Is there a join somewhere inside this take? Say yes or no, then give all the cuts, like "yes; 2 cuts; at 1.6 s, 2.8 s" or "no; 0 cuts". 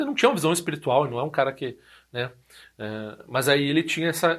no; 0 cuts